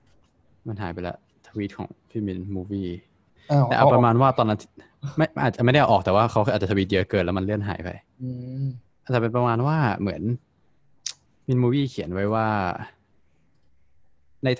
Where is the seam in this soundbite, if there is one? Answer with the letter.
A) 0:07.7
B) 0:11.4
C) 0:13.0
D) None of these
B